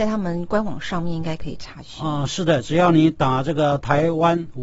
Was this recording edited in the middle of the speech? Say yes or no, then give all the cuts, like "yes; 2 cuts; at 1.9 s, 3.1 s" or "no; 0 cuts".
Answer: no; 0 cuts